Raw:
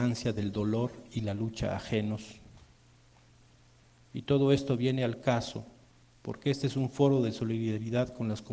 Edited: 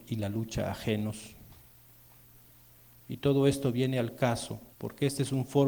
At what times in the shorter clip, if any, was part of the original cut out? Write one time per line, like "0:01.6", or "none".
0:04.7